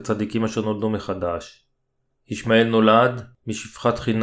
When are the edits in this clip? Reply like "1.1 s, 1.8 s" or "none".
2.1 s